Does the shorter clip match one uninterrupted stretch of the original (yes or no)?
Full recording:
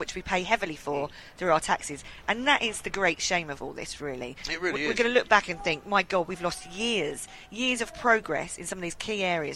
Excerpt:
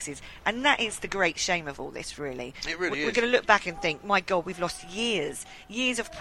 yes